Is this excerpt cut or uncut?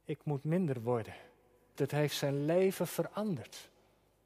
cut